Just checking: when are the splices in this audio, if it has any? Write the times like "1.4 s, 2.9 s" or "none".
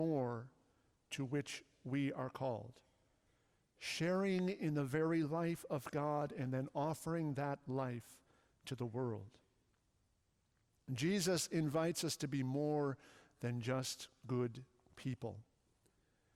none